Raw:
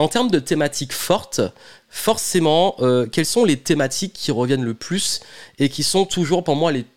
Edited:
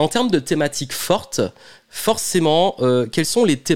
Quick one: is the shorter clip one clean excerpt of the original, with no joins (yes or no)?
yes